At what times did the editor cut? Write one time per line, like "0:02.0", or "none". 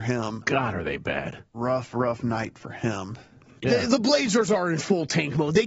0:01.5
0:03.6